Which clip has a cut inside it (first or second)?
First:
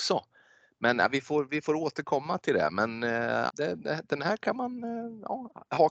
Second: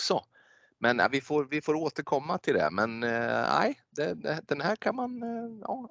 first